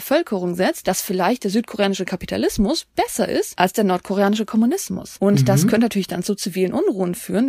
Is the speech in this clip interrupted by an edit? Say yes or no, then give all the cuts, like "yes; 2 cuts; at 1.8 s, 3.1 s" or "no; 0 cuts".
no; 0 cuts